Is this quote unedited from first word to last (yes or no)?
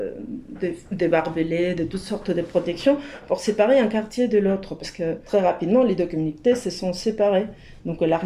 yes